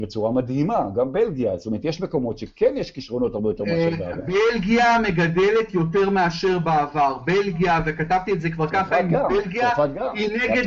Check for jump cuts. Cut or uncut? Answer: uncut